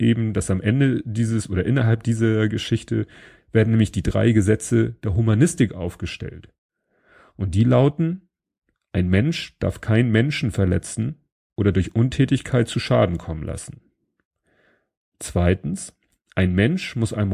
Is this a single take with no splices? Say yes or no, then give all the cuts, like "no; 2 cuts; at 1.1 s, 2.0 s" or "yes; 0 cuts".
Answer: yes; 0 cuts